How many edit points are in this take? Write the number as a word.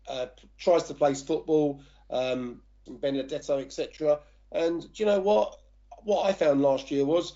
one